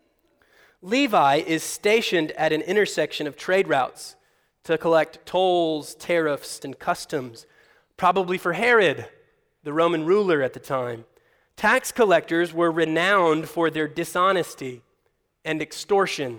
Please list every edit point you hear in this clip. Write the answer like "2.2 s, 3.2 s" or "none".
6.6 s